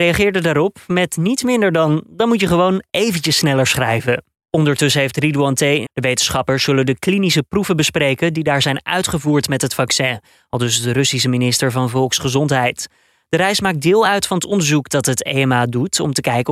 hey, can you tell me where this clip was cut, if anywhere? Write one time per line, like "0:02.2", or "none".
0:05.9